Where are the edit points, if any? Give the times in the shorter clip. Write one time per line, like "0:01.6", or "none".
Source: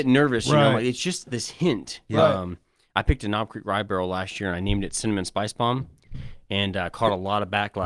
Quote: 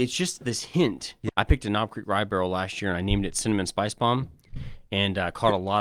0:01.3